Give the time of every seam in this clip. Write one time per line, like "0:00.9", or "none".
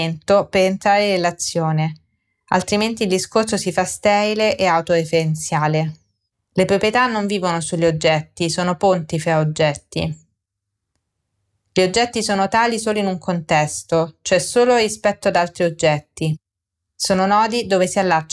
0:06.3